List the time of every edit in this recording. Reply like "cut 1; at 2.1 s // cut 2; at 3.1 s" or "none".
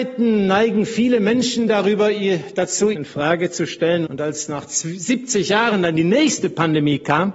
cut 1; at 2.9 s // cut 2; at 4.0 s

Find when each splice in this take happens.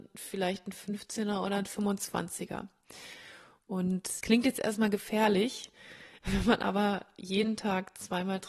cut 1; at 4.2 s

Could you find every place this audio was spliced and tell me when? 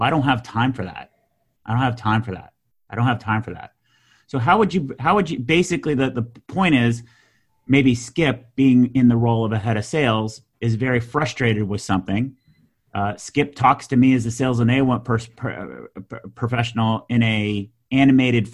none

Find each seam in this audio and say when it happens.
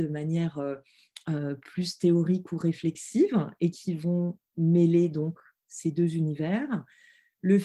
none

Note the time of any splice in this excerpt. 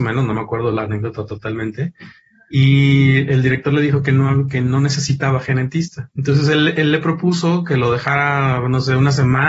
none

